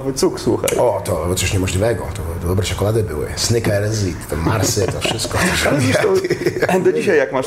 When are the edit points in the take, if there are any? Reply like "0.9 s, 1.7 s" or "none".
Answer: none